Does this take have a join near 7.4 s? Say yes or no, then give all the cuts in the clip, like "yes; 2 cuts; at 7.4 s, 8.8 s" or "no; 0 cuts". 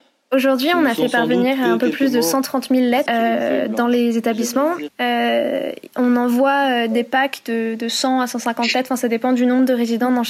no; 2 cuts; at 3.1 s, 4.9 s